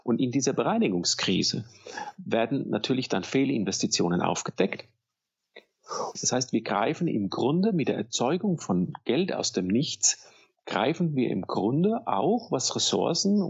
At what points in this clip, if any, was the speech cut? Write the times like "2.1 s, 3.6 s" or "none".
6.1 s